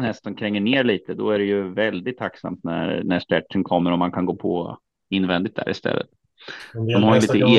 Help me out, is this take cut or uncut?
uncut